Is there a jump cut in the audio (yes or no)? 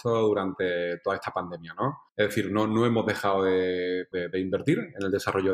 yes